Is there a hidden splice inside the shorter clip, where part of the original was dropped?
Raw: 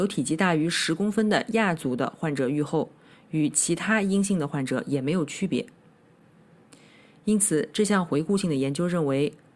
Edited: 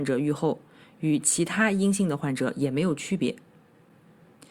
no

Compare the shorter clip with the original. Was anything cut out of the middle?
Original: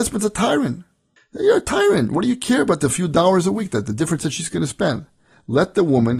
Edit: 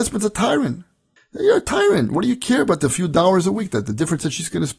no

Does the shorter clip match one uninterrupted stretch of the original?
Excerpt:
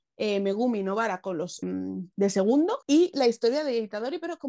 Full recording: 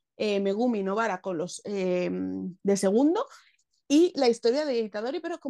no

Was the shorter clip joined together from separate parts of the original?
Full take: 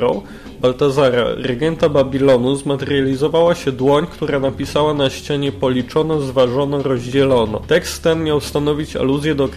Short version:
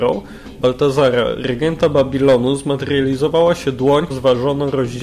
yes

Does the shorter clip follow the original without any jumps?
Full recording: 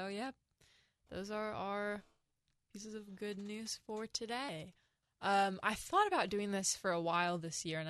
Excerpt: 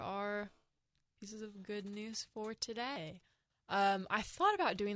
yes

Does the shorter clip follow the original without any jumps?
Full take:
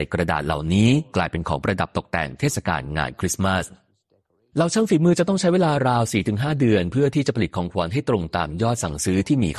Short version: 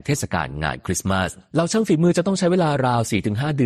no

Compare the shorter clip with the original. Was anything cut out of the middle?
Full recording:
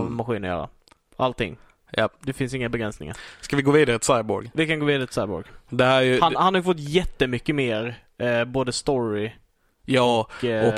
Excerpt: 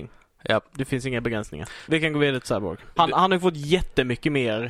yes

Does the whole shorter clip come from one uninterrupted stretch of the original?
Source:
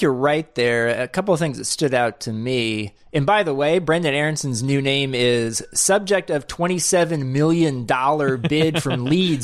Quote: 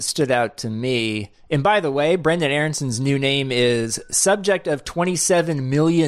yes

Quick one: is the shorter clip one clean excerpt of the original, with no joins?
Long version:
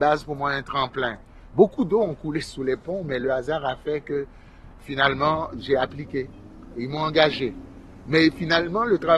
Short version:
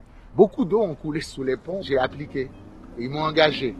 no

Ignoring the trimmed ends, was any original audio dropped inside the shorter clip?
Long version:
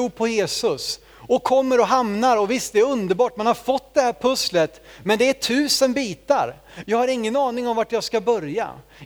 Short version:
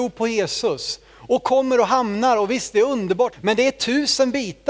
yes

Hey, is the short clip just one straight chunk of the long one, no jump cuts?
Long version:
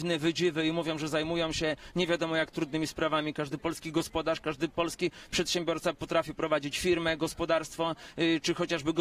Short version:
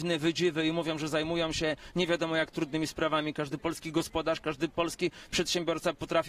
yes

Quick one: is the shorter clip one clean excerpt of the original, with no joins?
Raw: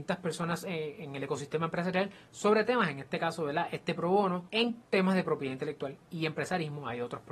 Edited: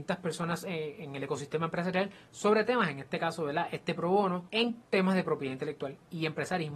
yes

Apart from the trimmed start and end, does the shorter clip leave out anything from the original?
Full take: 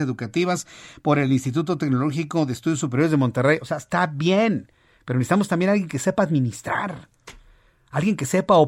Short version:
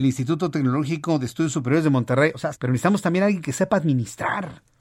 yes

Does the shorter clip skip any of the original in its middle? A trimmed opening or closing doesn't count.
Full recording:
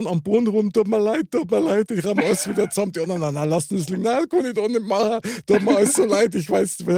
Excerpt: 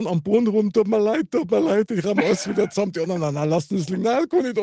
no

